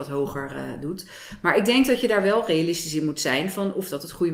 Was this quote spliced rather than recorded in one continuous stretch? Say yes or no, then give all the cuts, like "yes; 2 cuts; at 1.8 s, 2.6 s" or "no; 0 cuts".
no; 0 cuts